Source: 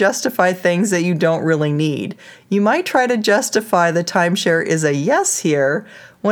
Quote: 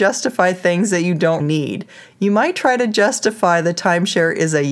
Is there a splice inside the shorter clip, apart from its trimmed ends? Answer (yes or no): yes